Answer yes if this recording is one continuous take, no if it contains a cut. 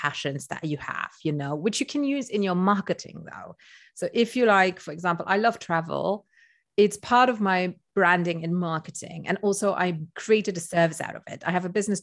yes